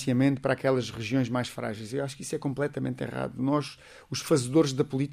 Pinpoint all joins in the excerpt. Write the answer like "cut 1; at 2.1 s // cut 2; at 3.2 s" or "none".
none

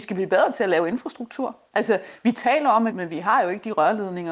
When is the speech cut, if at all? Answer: cut 1; at 2.9 s

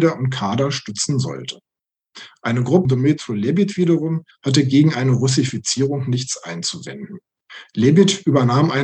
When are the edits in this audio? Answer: cut 1; at 2.9 s // cut 2; at 4.3 s

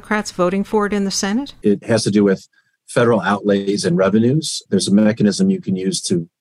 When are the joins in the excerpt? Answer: cut 1; at 1.6 s

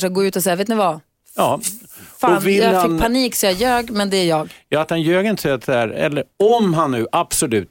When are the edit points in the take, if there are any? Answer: none

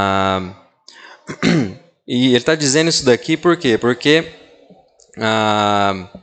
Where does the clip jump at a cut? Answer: none

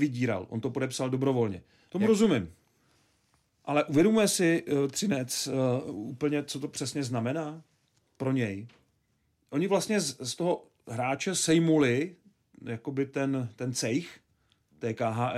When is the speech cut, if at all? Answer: cut 1; at 1.9 s

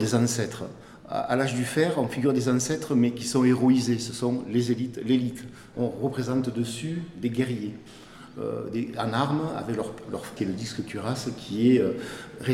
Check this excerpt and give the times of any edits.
cut 1; at 10.4 s

